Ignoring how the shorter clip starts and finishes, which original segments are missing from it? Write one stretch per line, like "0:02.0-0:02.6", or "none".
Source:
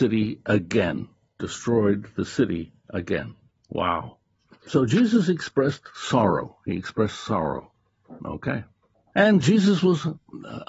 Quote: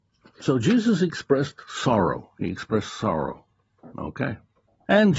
none